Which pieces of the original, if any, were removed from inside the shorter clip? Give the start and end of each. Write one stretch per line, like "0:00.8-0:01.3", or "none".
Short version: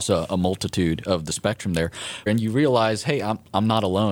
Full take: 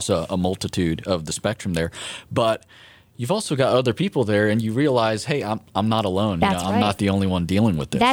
0:02.3-0:04.5